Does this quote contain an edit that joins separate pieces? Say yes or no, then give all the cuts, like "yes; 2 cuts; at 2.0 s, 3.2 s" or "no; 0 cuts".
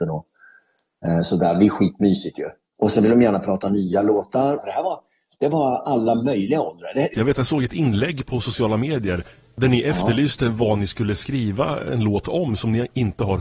yes; 2 cuts; at 4.6 s, 7.1 s